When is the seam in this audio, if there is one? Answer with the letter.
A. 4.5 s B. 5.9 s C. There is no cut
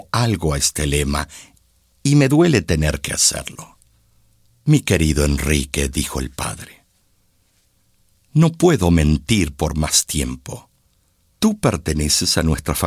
A